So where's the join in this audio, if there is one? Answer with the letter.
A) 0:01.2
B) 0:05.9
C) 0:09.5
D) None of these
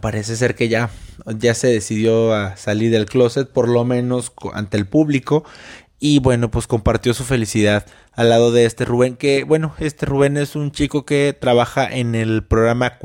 D